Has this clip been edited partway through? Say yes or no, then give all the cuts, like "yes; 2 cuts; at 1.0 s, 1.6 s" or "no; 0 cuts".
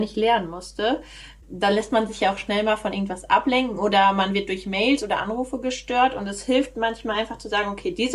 no; 0 cuts